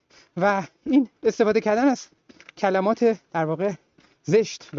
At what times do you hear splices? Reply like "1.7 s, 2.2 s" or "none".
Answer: 1.2 s, 3.2 s